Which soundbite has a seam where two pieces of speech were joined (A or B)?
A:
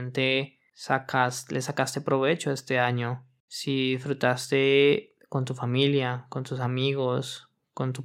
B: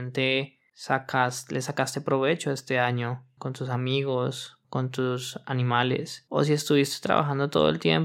B